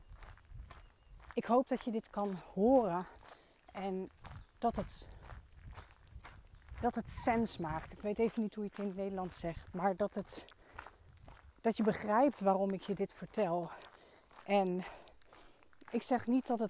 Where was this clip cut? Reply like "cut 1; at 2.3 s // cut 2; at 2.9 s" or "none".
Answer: none